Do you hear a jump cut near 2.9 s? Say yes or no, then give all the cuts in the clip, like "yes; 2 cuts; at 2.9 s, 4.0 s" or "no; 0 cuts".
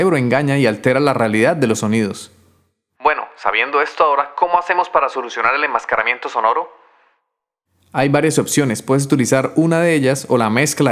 yes; 1 cut; at 2.9 s